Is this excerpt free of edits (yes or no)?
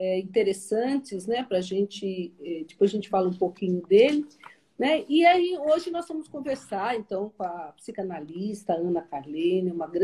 yes